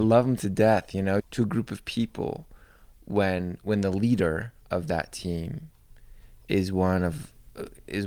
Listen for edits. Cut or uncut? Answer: cut